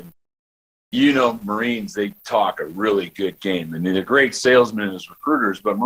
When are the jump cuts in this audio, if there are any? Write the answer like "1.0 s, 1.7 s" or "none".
none